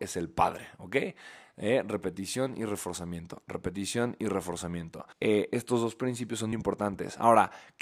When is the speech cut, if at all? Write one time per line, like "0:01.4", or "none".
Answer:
0:05.1
0:06.5